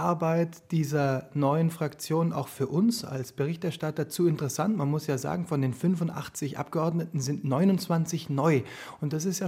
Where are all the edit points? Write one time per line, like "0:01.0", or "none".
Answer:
none

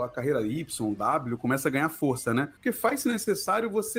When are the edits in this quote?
none

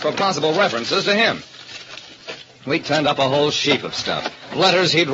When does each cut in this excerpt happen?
none

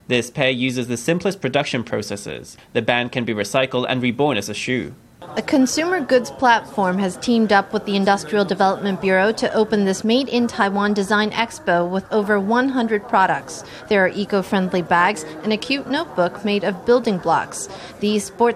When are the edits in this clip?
none

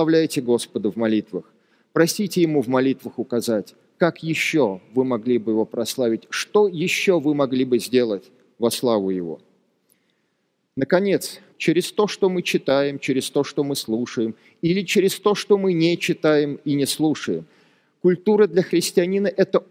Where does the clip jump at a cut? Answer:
0:11.5

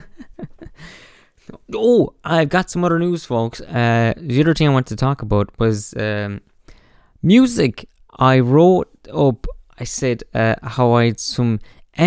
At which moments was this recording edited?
0:08.0

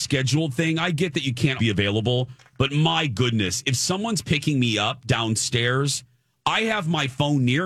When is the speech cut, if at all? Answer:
0:01.6

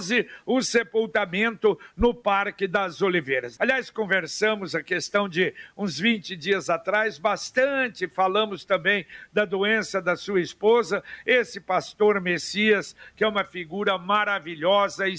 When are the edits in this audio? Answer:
0:03.6

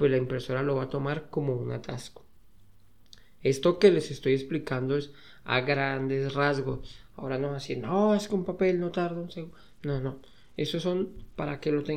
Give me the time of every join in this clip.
none

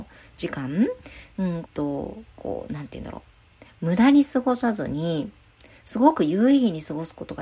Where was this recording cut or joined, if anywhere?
0:01.6

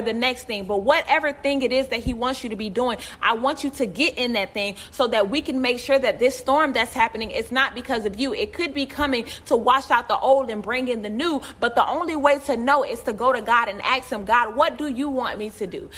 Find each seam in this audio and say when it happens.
none

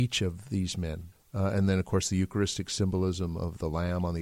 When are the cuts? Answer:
0:01.1

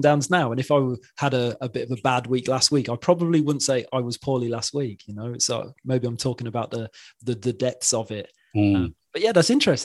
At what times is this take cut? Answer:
none

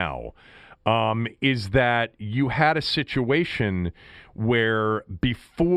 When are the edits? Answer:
none

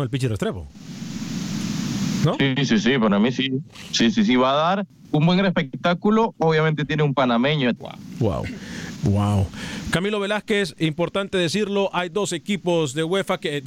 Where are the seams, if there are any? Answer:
0:07.8
0:09.0

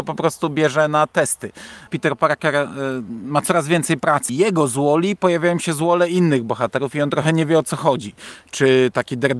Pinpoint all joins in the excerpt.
0:01.9
0:04.3

